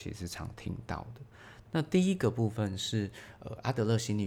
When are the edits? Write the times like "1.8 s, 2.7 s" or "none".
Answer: 1.6 s